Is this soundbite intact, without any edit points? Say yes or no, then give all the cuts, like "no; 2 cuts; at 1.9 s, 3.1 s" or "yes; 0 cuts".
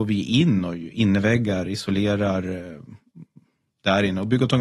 yes; 0 cuts